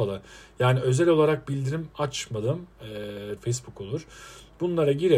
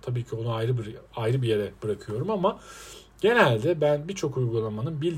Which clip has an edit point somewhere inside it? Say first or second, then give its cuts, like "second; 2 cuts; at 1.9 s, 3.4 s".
first; 1 cut; at 3.4 s